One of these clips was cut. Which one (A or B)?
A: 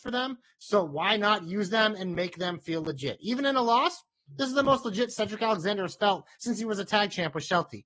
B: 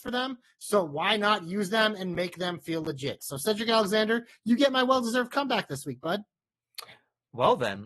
B